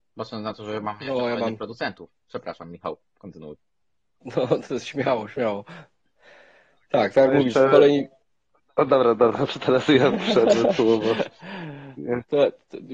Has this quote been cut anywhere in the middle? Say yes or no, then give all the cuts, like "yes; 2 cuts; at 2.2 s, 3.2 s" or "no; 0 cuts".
no; 0 cuts